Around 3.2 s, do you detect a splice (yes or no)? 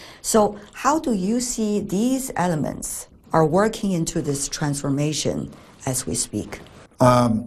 yes